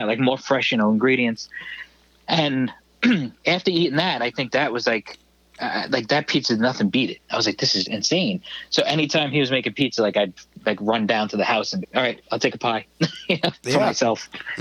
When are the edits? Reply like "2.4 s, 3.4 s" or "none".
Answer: 7.8 s, 11.8 s